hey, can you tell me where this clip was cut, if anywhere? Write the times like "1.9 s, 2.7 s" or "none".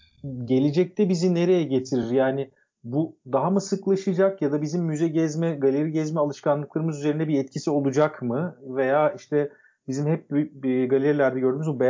none